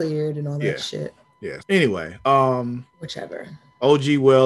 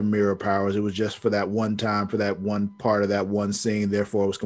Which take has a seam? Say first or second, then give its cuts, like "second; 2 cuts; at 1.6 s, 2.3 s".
first; 2 cuts; at 1.6 s, 2.9 s